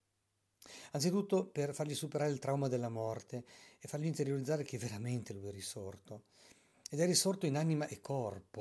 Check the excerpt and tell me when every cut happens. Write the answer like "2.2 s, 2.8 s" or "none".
none